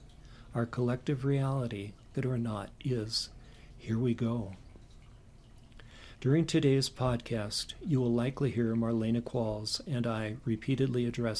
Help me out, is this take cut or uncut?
cut